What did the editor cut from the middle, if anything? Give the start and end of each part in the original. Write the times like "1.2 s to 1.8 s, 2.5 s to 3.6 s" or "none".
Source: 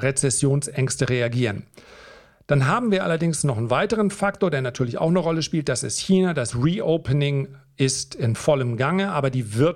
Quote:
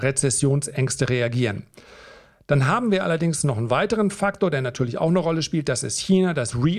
none

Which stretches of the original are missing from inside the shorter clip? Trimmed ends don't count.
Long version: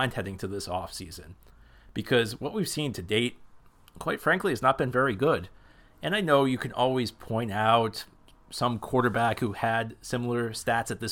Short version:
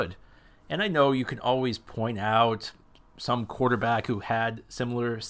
none

